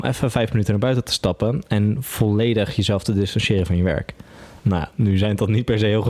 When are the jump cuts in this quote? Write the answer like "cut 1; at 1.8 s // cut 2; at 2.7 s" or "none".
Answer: cut 1; at 4.6 s

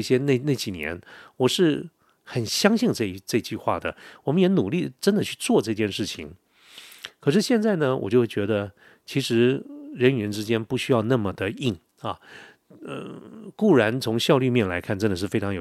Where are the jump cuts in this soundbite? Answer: none

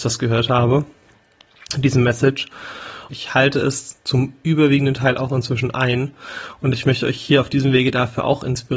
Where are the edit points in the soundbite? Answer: cut 1; at 3.1 s

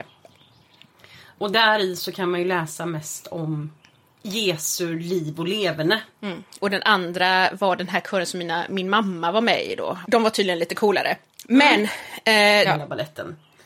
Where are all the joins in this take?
cut 1; at 6.6 s // cut 2; at 10.0 s // cut 3; at 12.6 s

